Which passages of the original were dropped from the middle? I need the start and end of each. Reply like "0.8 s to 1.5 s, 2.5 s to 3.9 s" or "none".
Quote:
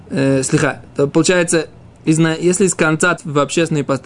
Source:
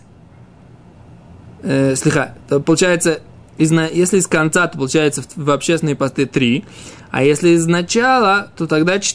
4.7 s to 5.3 s